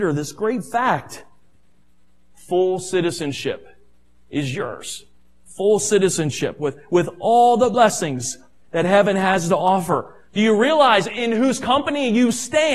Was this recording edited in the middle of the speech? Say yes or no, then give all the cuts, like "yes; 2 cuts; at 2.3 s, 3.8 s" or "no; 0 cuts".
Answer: no; 0 cuts